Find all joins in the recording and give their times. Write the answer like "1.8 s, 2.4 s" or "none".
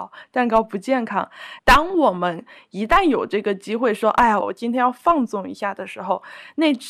1.6 s, 4.4 s